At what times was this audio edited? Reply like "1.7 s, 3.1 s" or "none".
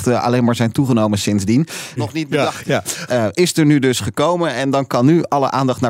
2.0 s, 3.1 s